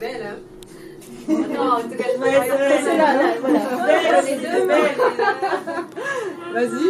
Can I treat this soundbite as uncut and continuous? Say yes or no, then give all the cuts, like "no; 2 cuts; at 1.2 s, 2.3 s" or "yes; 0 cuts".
yes; 0 cuts